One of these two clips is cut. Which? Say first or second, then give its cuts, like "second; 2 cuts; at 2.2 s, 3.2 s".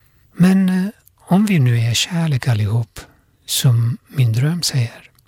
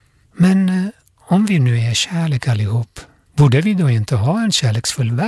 second; 1 cut; at 3.3 s